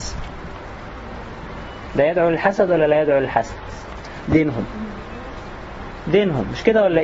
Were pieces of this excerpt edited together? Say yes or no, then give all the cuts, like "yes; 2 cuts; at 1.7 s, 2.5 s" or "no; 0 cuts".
yes; 1 cut; at 4.2 s